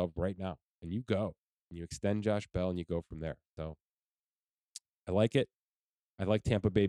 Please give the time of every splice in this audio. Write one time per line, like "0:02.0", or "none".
none